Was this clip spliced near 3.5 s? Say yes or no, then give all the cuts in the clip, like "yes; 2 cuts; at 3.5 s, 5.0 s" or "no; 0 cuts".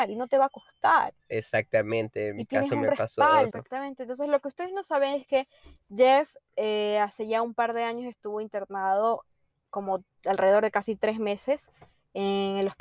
yes; 1 cut; at 3.5 s